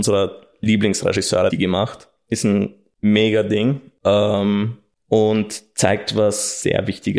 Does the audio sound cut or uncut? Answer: cut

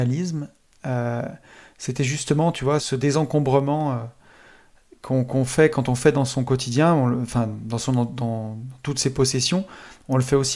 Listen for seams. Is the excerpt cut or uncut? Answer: cut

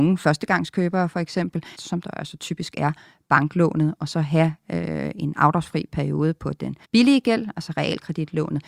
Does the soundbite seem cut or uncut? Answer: cut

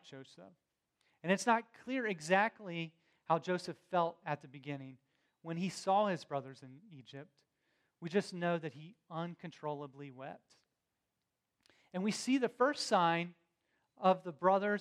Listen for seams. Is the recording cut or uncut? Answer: uncut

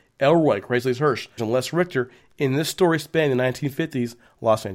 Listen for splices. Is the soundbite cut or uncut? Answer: cut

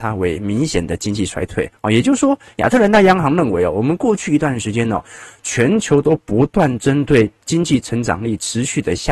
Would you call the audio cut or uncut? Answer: uncut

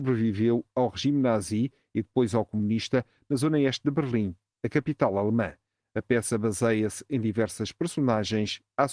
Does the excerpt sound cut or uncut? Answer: uncut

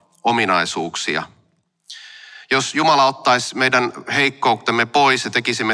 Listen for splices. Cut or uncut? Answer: uncut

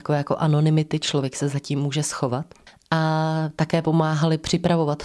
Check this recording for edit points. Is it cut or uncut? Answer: uncut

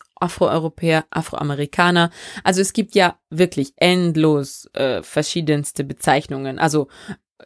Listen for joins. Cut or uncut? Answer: uncut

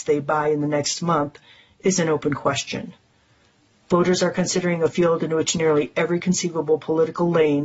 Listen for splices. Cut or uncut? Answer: uncut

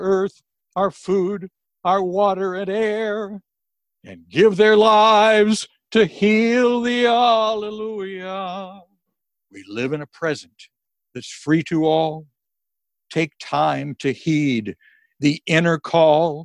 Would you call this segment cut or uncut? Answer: uncut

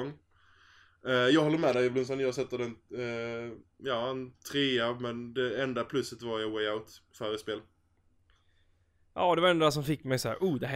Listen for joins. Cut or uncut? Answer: cut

